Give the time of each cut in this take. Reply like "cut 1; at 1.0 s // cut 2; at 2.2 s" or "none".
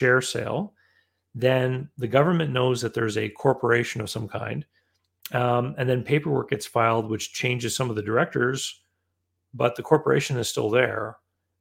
none